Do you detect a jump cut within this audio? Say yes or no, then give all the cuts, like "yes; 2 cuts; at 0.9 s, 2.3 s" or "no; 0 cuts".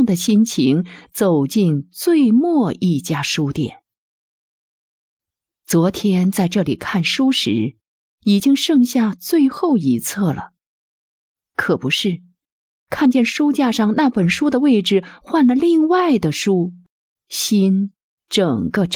no; 0 cuts